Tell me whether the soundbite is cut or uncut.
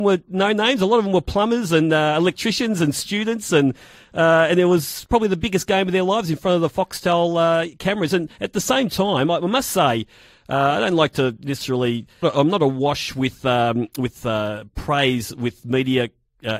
cut